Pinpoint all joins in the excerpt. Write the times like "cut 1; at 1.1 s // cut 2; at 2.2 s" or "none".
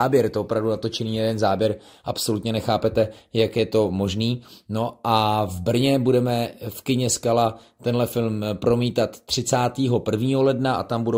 none